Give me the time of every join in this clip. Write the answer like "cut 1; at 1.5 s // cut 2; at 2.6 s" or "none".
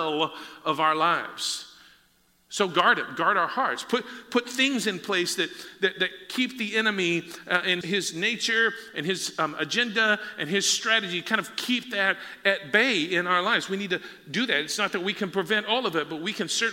cut 1; at 7.8 s